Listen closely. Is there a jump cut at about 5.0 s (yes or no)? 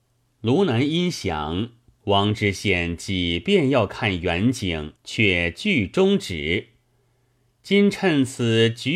yes